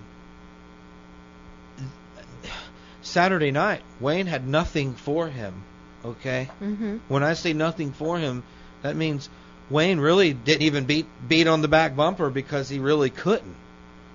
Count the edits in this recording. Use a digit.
0